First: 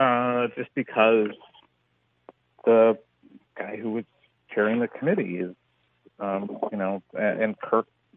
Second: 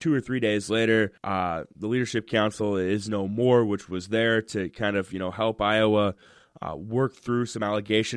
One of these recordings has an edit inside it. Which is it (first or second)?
second